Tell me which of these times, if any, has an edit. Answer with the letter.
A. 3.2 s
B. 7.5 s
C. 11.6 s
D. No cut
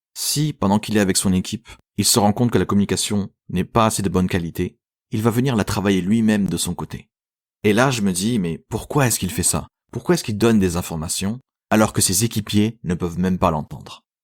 B